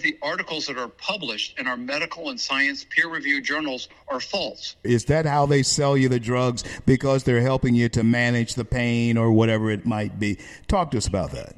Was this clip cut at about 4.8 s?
yes; 1 cut; at 4.8 s

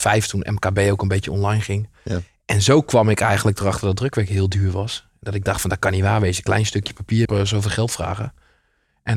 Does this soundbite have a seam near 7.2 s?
yes; 1 cut; at 7.2 s

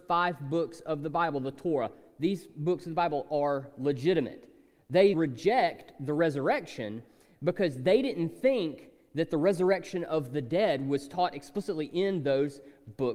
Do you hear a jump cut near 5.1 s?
yes; 1 cut; at 5.1 s

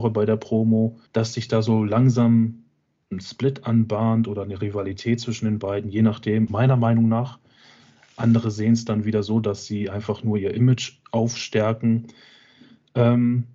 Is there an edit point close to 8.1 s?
no; 2 cuts; at 1.1 s, 6.5 s

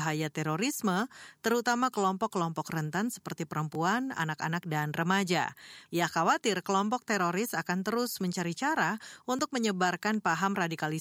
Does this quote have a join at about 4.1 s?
no; 1 cut; at 5.9 s

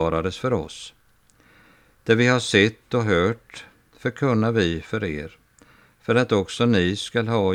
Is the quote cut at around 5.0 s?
no; 0 cuts

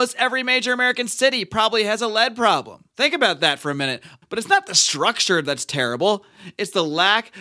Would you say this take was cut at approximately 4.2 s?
yes; 2 cuts; at 2.9 s, 4.2 s

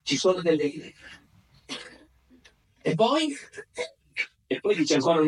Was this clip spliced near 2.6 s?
yes; 1 cut; at 2.6 s

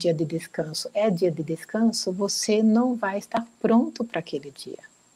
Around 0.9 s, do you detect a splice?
no; 0 cuts

